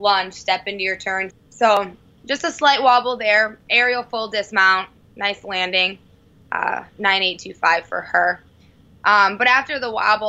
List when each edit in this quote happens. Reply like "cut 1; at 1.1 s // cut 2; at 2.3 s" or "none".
cut 1; at 1.3 s